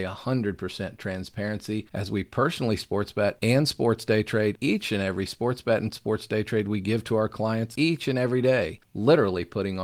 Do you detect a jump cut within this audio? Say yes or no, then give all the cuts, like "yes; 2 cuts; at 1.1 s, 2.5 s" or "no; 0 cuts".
yes; 1 cut; at 8.8 s